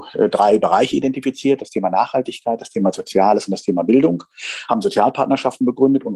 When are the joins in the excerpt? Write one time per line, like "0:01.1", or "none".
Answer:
none